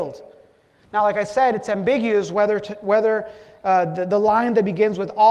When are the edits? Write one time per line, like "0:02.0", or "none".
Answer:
none